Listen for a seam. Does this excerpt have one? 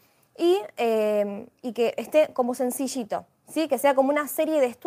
no; 0 cuts

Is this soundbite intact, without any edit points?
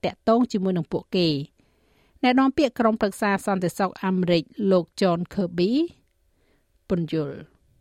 yes; 0 cuts

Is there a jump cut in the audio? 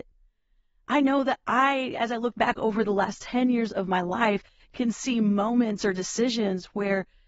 no; 0 cuts

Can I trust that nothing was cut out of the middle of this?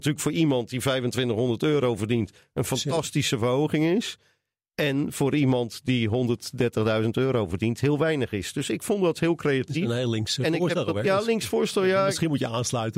yes; 0 cuts

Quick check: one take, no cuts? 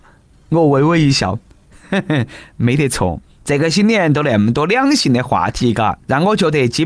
no; 1 cut; at 3.4 s

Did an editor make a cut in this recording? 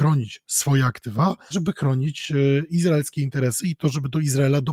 yes; 1 cut; at 1.5 s

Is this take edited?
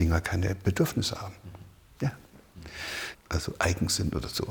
yes; 1 cut; at 3.1 s

